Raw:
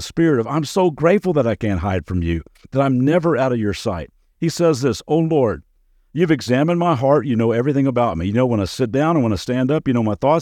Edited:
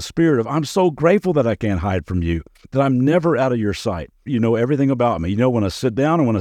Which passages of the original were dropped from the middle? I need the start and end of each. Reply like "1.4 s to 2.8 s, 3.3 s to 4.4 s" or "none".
4.3 s to 7.2 s